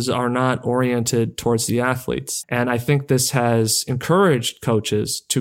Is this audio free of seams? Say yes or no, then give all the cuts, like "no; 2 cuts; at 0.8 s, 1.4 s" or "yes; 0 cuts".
no; 1 cut; at 2.4 s